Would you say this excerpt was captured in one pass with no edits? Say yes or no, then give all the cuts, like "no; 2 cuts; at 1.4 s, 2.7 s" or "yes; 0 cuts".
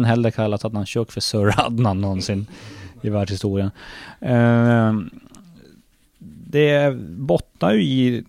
yes; 0 cuts